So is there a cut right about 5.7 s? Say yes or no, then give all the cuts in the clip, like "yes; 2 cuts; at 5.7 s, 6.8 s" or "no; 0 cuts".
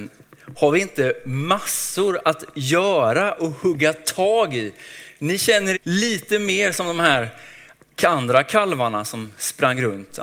yes; 1 cut; at 5.7 s